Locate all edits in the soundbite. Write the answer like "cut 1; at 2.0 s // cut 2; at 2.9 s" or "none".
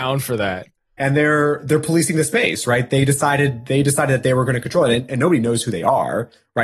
none